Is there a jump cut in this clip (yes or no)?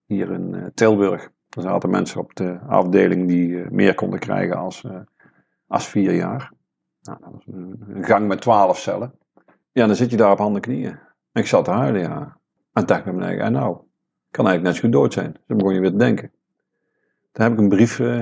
no